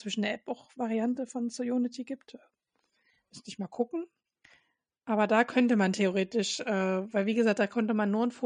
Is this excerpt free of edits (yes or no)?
yes